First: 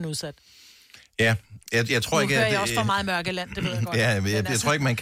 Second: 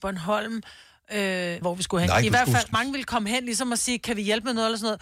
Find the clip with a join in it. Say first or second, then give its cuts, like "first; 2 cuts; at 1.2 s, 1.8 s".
second; 2 cuts; at 1.6 s, 2.7 s